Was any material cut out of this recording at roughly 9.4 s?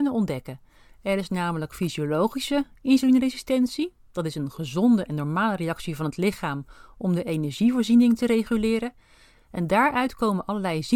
yes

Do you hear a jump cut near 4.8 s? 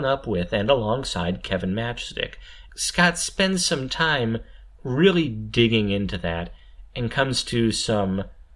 no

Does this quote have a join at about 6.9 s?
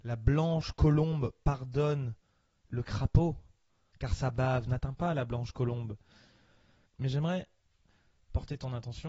yes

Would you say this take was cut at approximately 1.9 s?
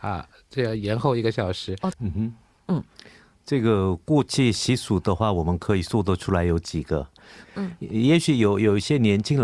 yes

